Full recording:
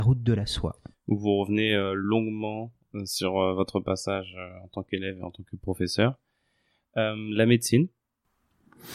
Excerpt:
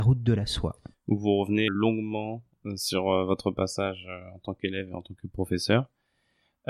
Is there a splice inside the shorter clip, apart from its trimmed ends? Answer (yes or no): yes